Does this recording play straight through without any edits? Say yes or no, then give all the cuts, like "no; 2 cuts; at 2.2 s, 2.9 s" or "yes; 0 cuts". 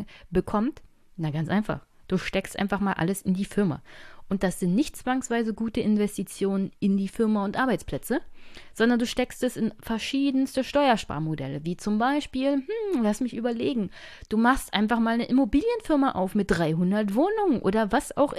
yes; 0 cuts